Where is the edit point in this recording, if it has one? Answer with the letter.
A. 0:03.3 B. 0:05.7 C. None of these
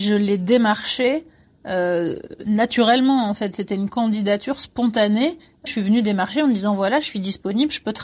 B